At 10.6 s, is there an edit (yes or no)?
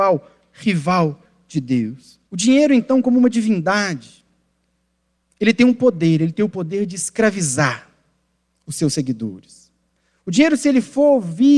no